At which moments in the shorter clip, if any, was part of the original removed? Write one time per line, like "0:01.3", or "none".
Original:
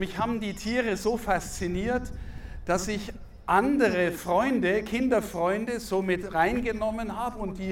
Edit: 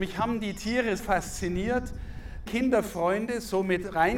0:01.0
0:02.5

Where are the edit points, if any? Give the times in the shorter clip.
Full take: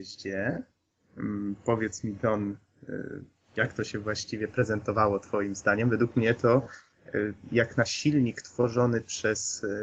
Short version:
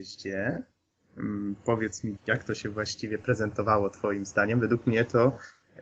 0:02.2

